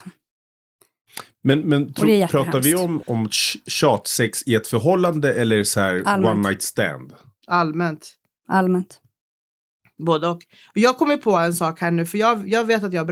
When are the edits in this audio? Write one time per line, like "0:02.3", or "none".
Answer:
0:03.0